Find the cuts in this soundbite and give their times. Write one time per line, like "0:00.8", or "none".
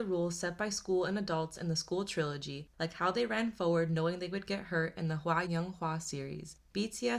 0:05.5